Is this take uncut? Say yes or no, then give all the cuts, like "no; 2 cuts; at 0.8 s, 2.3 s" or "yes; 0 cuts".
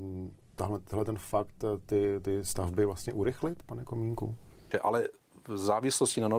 no; 1 cut; at 4.7 s